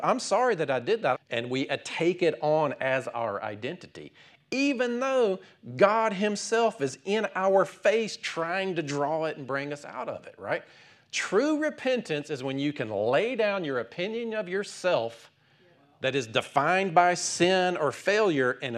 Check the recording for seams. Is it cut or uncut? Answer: cut